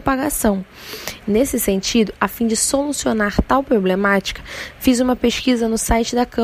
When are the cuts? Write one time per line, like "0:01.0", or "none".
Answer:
0:01.2